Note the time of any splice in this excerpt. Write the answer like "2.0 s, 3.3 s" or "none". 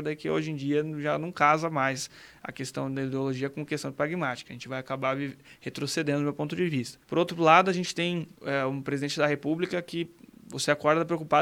7.0 s, 8.4 s